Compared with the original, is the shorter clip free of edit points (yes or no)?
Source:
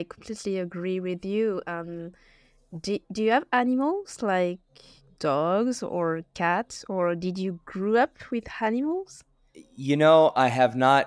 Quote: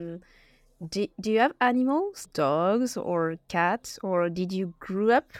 no